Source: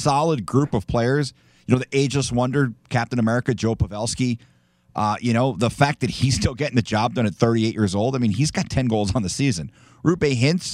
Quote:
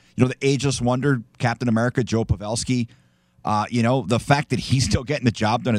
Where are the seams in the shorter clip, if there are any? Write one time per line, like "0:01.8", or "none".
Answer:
none